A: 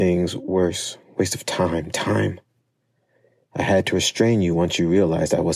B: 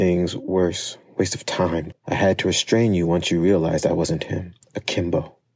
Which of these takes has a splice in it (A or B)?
B